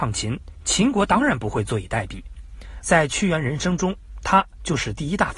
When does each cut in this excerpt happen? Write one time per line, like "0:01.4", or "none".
0:02.8